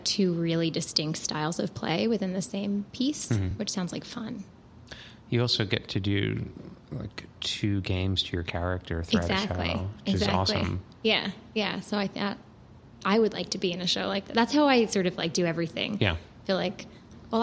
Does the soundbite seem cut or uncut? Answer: uncut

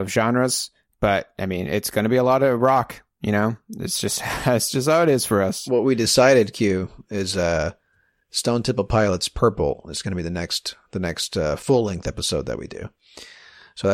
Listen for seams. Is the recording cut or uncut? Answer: uncut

